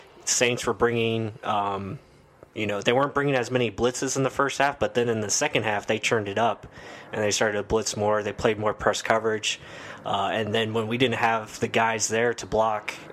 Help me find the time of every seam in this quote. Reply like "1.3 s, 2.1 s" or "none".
none